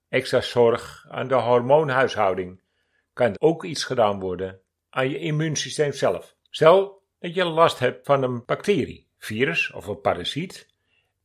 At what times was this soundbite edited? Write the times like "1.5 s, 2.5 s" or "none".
3.3 s, 6.4 s